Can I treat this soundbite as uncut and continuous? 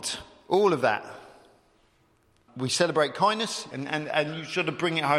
no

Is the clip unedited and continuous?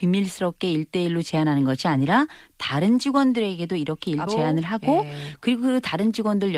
no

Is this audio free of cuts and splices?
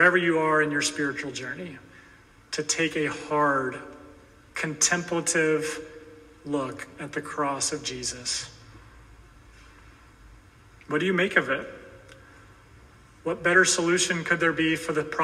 yes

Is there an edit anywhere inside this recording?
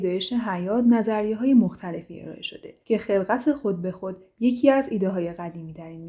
yes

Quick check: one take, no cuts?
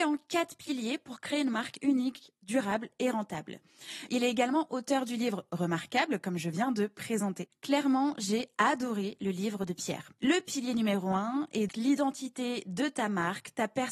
no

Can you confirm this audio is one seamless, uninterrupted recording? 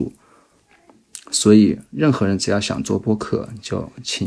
yes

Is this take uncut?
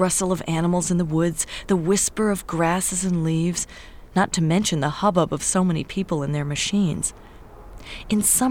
yes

